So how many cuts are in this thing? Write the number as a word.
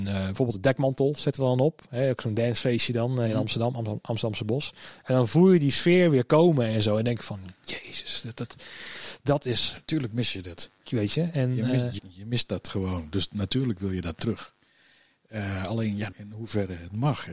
two